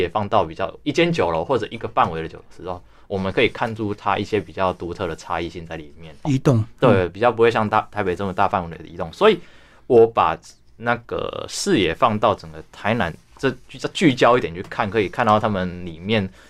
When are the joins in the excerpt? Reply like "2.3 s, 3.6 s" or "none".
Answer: 6.2 s